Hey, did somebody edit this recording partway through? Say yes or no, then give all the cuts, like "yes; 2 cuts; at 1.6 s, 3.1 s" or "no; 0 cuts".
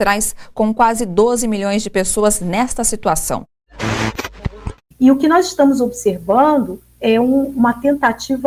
no; 0 cuts